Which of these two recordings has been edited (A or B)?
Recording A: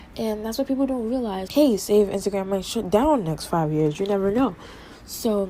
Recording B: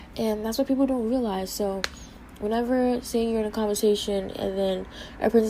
A